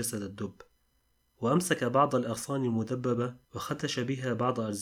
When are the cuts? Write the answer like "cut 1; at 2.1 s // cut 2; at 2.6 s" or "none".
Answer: cut 1; at 3.4 s